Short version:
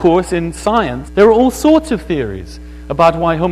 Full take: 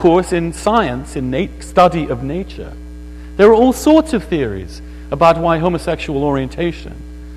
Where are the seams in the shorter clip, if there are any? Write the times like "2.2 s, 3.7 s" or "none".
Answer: 1.1 s